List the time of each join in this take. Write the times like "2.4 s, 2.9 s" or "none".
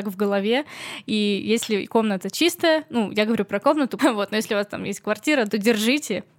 4.0 s, 5.5 s